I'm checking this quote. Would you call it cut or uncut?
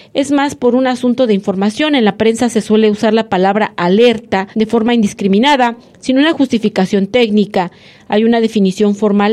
cut